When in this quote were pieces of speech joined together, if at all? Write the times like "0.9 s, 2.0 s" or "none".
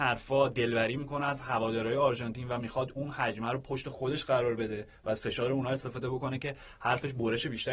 none